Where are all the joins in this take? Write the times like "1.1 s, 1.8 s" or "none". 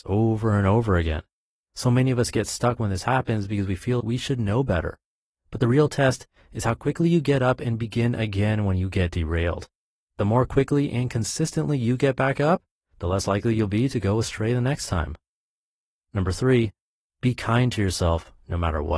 4.0 s